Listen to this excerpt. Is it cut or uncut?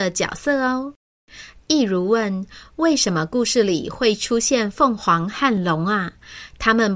uncut